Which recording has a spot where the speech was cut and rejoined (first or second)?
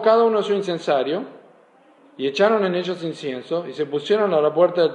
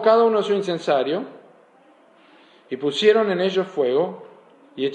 first